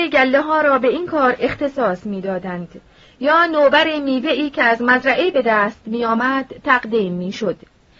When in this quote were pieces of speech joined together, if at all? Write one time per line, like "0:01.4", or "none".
none